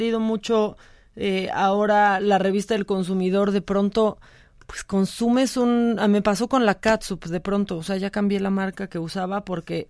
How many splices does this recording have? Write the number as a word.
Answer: zero